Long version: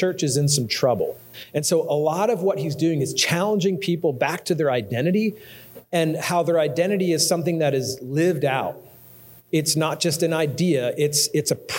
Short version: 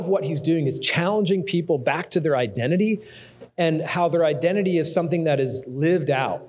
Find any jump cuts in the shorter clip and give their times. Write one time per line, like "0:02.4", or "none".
none